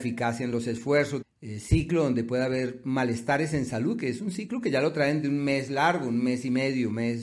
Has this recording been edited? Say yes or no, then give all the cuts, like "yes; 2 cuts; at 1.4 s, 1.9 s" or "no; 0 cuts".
yes; 1 cut; at 1.2 s